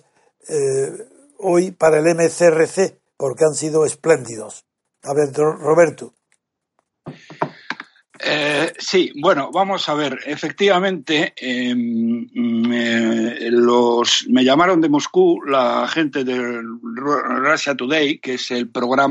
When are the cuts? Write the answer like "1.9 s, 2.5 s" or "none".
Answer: none